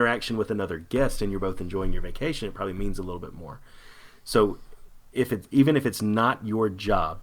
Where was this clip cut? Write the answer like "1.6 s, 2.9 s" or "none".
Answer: none